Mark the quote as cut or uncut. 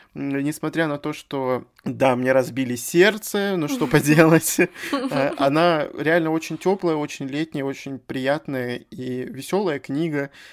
uncut